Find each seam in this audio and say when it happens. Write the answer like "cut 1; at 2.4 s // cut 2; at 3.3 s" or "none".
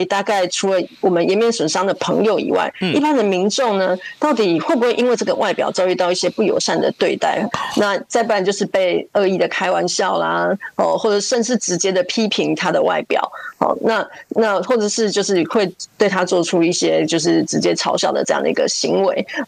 cut 1; at 7.5 s